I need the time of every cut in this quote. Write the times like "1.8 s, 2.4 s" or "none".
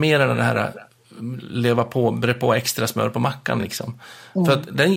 none